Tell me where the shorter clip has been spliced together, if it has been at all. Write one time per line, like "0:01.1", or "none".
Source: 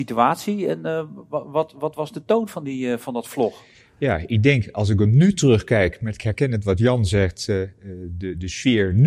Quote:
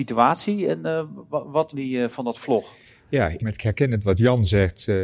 0:01.7
0:03.4